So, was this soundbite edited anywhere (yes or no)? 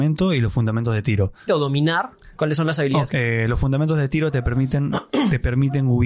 yes